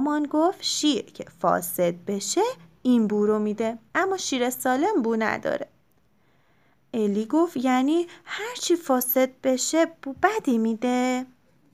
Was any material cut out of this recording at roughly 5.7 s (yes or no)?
no